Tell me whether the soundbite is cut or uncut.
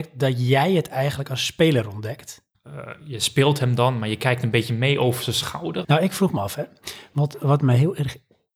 cut